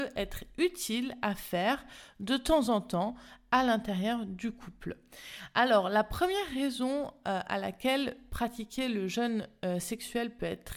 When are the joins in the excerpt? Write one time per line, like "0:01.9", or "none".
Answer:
none